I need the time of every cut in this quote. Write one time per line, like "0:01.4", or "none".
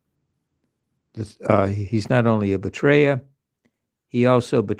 none